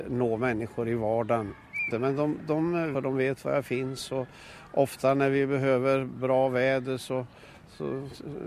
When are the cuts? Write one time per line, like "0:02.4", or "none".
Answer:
0:01.9
0:02.9